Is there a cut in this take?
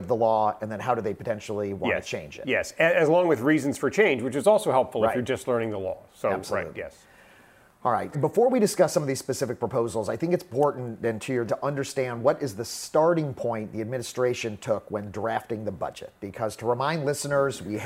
yes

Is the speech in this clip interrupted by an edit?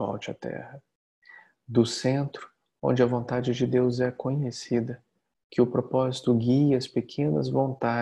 no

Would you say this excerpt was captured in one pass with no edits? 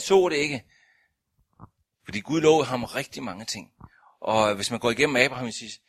no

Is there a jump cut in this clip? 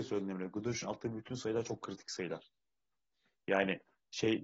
no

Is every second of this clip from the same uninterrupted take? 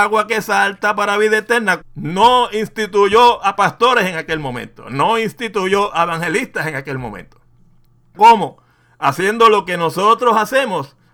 no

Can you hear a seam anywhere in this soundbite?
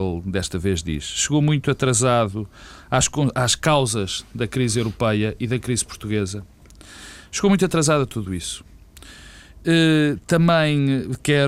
no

